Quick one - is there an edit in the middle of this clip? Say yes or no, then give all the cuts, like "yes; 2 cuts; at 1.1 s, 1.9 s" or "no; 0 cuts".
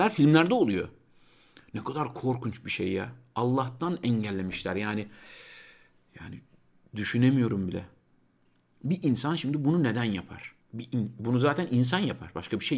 yes; 1 cut; at 10.6 s